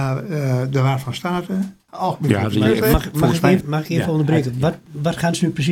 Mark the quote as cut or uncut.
cut